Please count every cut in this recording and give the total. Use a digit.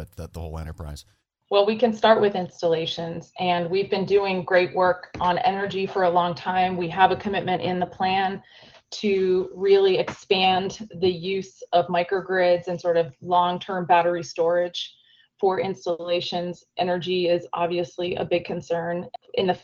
0